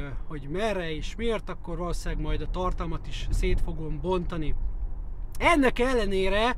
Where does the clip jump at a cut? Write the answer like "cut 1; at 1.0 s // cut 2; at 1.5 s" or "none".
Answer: cut 1; at 5.3 s